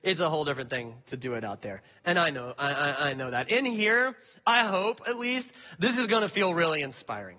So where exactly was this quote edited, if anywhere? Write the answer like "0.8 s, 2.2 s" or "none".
none